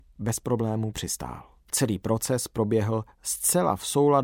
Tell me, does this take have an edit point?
yes; 1 cut; at 1.7 s

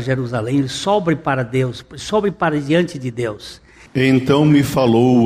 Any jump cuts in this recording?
yes; 1 cut; at 3.9 s

